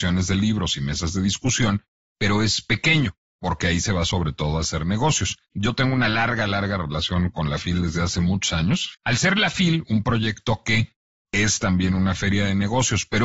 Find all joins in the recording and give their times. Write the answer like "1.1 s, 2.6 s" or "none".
5.5 s, 8.9 s